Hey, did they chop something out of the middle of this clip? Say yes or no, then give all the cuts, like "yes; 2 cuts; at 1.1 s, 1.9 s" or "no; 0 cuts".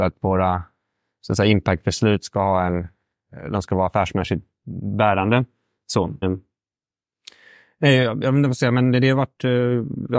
yes; 1 cut; at 6.2 s